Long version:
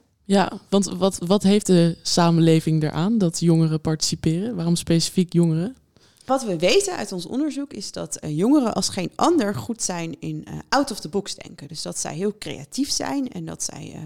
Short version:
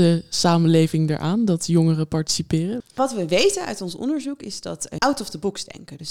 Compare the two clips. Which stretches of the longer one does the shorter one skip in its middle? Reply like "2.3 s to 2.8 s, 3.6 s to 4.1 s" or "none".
4.5 s to 6.1 s, 8.3 s to 10.7 s